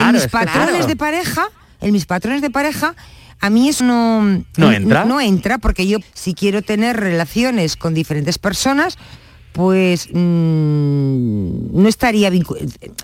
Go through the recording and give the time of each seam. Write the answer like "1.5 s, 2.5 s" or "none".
3.8 s, 6.0 s